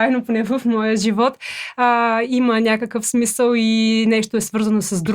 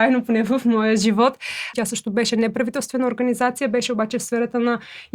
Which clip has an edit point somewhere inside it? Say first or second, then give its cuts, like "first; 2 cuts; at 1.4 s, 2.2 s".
second; 1 cut; at 1.7 s